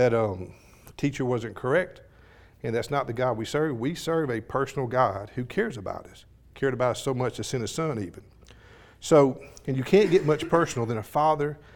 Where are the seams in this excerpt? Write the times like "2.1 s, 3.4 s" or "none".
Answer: none